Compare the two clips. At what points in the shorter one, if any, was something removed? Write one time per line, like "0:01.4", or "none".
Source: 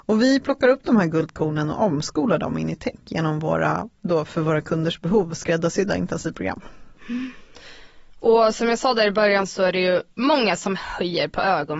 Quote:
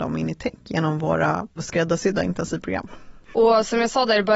0:01.6
0:03.3